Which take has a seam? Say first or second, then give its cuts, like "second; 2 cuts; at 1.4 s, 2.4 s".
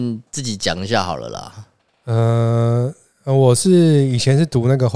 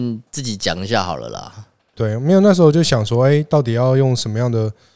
second; 1 cut; at 1.9 s